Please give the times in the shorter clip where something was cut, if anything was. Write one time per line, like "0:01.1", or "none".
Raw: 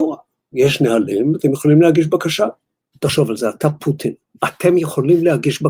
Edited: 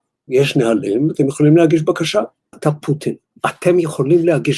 0:02.5